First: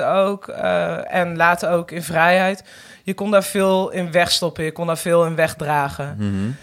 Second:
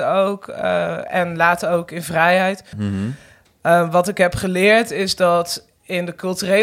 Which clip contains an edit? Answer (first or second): second